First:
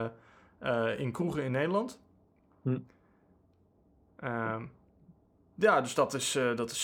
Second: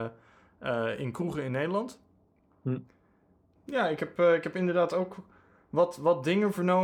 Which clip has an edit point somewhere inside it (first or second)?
second